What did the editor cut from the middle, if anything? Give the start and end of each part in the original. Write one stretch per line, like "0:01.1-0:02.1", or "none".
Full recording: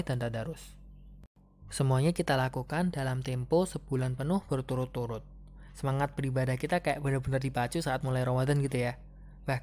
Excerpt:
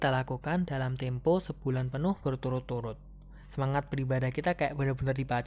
none